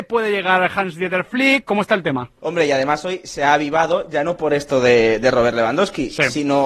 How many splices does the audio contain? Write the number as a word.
one